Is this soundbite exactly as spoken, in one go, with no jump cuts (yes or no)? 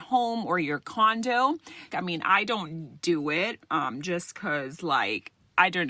no